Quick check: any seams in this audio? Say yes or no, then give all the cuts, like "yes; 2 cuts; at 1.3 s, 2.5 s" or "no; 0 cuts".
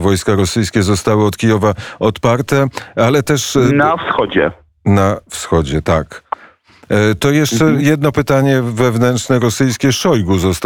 no; 0 cuts